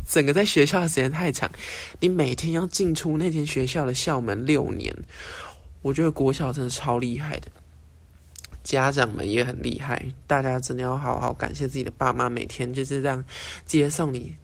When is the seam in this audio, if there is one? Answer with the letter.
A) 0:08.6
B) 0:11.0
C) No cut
C